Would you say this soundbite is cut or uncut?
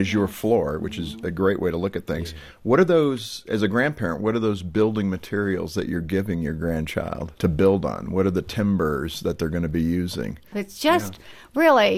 cut